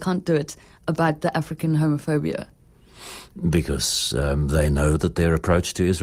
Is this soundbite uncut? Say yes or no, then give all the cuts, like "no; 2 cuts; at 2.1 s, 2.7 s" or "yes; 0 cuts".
yes; 0 cuts